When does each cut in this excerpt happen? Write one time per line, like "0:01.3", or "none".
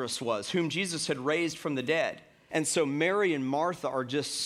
0:02.5